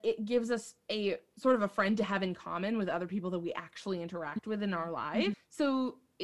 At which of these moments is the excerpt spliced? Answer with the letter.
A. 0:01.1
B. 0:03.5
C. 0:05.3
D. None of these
C